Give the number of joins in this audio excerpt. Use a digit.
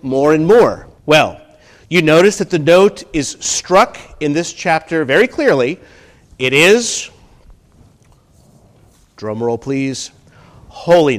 1